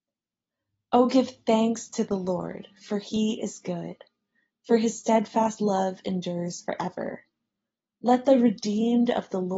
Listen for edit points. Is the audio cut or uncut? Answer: uncut